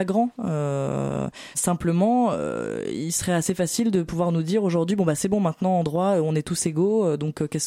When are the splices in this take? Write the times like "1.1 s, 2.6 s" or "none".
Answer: 1.5 s